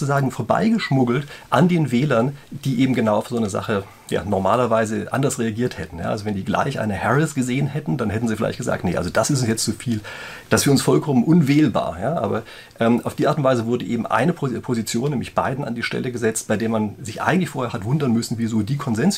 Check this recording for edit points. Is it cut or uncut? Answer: uncut